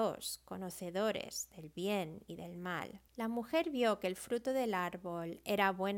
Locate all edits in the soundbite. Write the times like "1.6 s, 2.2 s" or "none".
3.1 s